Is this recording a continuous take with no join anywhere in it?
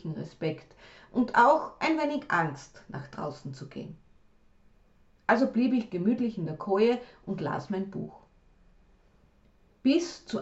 yes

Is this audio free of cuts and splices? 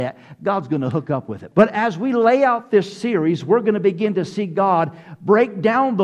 no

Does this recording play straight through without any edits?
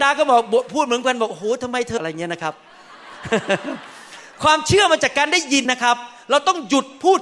no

